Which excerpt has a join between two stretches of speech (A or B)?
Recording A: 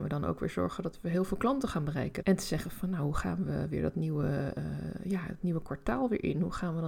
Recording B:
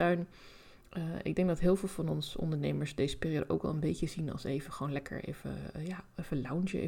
A